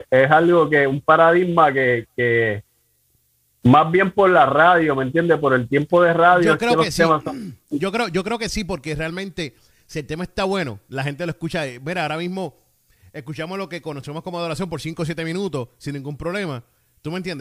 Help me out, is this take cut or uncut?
uncut